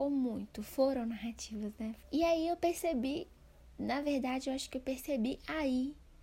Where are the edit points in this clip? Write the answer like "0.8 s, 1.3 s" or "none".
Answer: 2.0 s